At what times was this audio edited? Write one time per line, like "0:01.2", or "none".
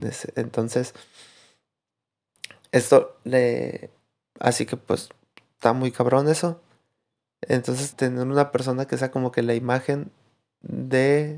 0:04.2
0:07.9